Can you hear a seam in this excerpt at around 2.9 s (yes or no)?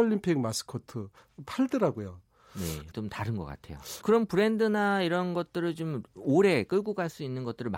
yes